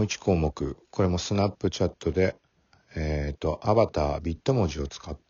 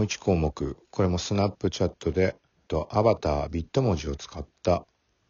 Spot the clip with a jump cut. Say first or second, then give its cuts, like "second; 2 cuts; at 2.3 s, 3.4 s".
second; 1 cut; at 2.7 s